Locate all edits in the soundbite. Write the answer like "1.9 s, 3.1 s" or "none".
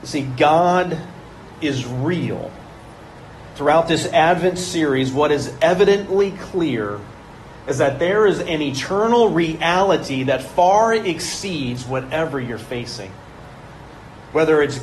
3.5 s

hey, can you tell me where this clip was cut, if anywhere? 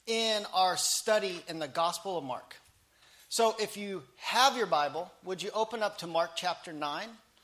none

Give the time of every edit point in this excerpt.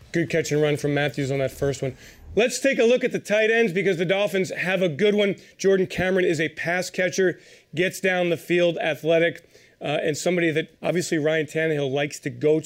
10.8 s

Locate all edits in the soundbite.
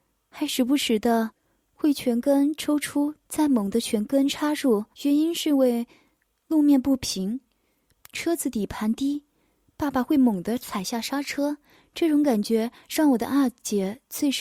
4.9 s

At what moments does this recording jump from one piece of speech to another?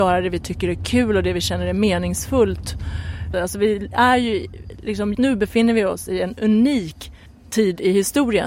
3.3 s, 5.1 s

